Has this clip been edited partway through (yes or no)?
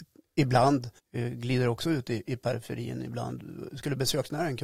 yes